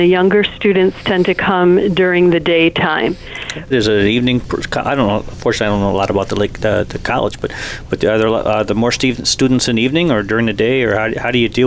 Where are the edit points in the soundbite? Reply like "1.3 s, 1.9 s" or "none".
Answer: 3.7 s